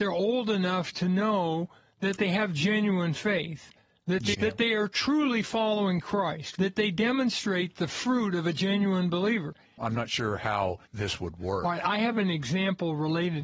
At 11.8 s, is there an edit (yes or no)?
no